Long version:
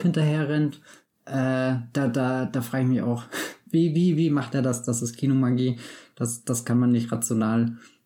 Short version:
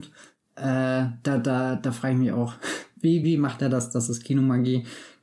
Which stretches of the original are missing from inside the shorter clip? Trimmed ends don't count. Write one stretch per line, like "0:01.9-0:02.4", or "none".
0:03.9-0:04.2